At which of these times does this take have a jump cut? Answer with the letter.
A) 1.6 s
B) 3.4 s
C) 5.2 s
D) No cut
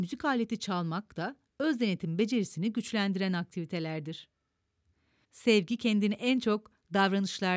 C